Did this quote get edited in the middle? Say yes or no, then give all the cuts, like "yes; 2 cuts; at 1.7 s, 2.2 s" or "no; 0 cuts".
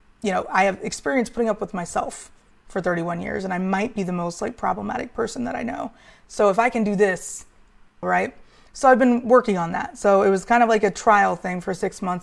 yes; 1 cut; at 8.0 s